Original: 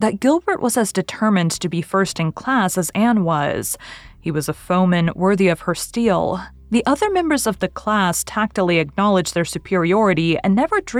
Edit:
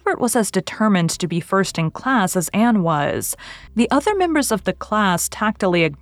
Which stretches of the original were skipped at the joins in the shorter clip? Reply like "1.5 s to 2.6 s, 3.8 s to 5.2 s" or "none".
4.1 s to 6.6 s